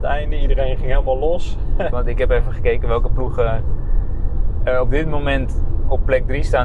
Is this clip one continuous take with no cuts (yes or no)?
no